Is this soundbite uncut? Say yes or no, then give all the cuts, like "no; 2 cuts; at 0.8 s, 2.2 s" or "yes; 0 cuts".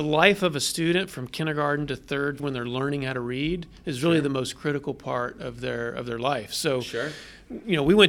no; 1 cut; at 2.4 s